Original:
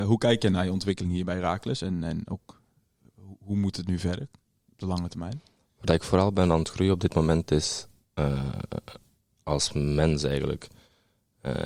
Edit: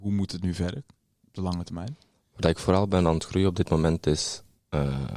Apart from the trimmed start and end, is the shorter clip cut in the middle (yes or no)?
no